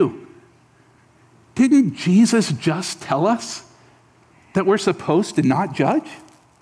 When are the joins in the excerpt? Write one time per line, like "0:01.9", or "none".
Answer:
none